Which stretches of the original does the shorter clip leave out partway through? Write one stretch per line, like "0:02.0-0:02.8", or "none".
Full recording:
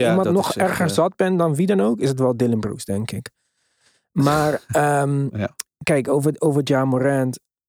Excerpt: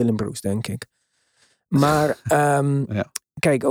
none